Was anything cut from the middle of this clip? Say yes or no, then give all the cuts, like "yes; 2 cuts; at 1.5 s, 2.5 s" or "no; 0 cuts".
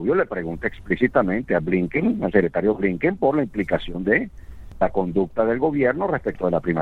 no; 0 cuts